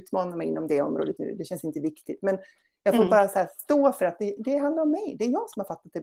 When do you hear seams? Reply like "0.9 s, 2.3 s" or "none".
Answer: 1.2 s, 4.4 s